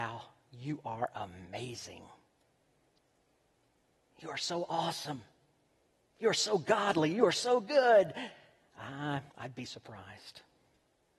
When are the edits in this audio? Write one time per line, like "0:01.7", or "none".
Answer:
0:09.3